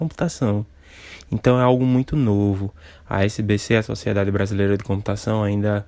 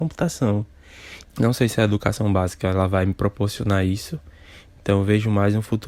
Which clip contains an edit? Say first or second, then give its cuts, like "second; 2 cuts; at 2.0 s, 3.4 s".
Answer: second; 1 cut; at 1.2 s